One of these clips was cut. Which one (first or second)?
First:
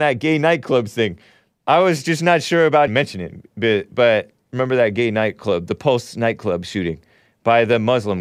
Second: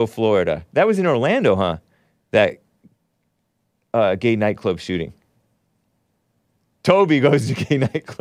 first